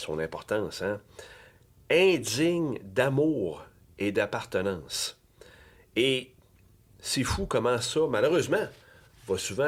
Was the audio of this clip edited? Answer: no; 0 cuts

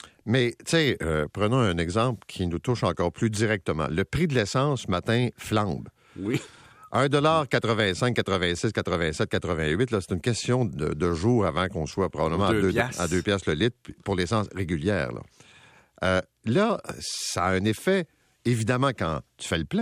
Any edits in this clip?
no; 0 cuts

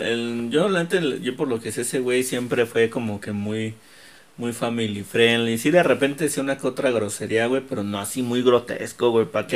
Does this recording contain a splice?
no; 0 cuts

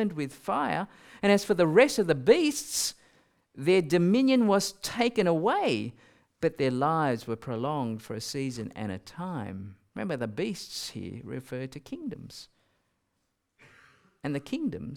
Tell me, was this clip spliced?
no; 0 cuts

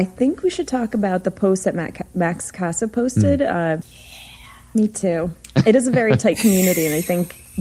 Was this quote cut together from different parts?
yes; 1 cut; at 3.8 s

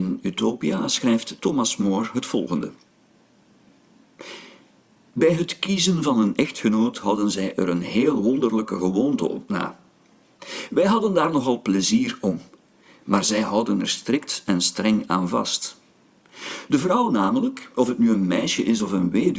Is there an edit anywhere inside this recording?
no; 0 cuts

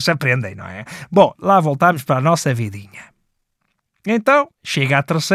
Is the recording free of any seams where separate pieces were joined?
no; 1 cut; at 1.4 s

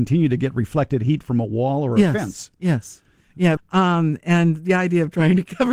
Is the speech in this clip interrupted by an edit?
yes; 1 cut; at 3.6 s

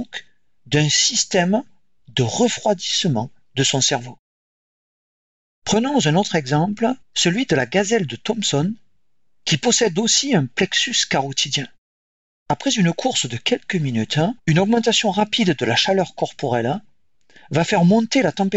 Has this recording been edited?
yes; 3 cuts; at 7.0 s, 12.3 s, 14.4 s

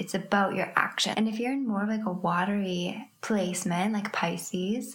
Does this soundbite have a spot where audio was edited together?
yes; 2 cuts; at 1.1 s, 3.2 s

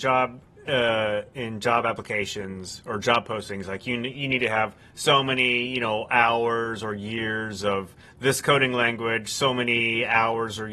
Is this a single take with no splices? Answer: yes; 0 cuts

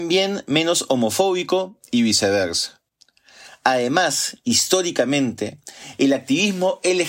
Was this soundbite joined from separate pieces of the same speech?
no; 0 cuts

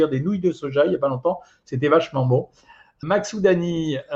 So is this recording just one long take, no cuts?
no; 1 cut; at 3.0 s

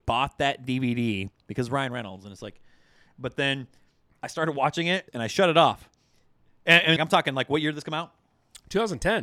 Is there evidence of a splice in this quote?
yes; 2 cuts; at 5.1 s, 7.0 s

